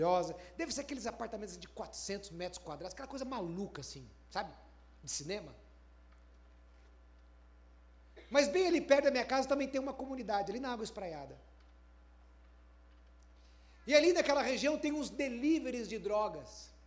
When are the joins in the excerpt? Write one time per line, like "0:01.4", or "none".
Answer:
none